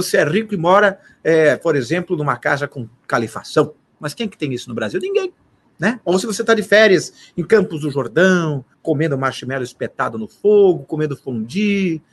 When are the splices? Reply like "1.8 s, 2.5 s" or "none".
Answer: 8.7 s